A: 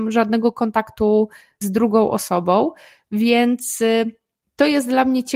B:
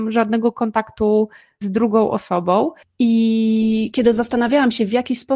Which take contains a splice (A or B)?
B